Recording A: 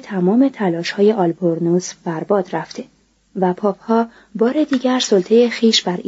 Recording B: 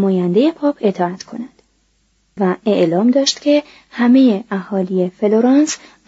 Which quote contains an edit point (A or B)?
B